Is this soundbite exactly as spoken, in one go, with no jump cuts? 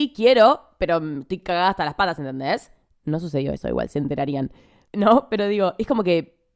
yes; 0 cuts

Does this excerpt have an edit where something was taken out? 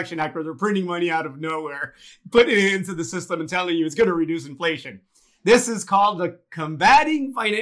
no; 0 cuts

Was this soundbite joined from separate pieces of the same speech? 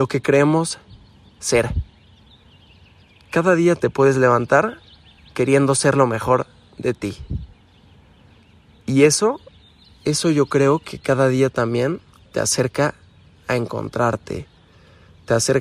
no; 0 cuts

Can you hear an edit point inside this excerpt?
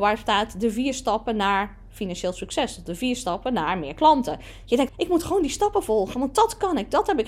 yes; 1 cut; at 4.9 s

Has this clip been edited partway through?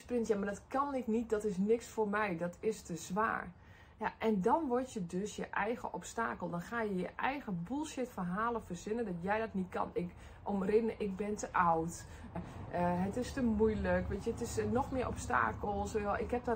yes; 1 cut; at 12.4 s

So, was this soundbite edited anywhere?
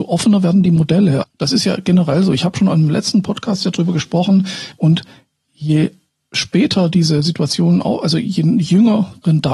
yes; 2 cuts; at 1.2 s, 4.7 s

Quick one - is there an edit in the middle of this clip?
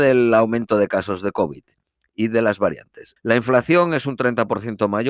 yes; 1 cut; at 3.2 s

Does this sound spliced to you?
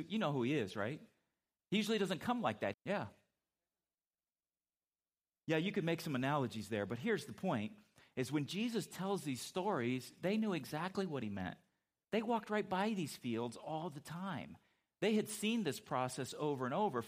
yes; 1 cut; at 2.7 s

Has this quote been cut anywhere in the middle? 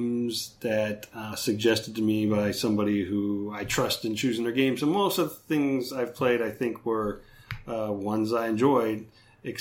yes; 1 cut; at 1.3 s

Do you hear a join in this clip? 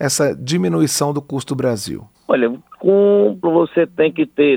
yes; 2 cuts; at 2.1 s, 3.4 s

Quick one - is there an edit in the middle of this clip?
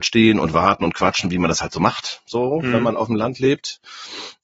no; 0 cuts

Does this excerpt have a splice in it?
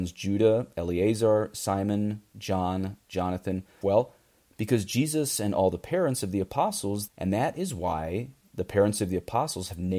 yes; 2 cuts; at 3.8 s, 7.1 s

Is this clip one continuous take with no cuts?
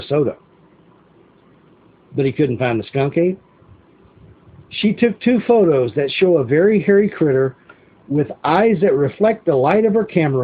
no; 1 cut; at 4.5 s

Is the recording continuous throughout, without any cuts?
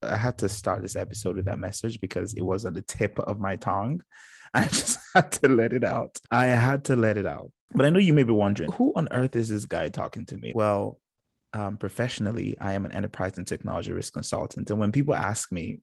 no; 2 cuts; at 8.6 s, 10.5 s

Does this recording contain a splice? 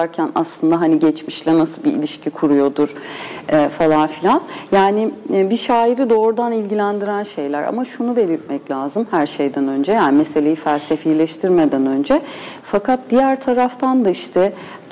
yes; 1 cut; at 12.6 s

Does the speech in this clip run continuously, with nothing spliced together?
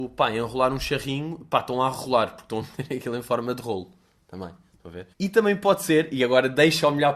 no; 1 cut; at 5.1 s

